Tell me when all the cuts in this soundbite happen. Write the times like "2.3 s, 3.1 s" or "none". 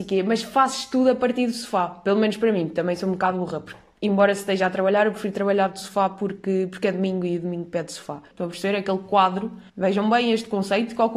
8.3 s, 9.7 s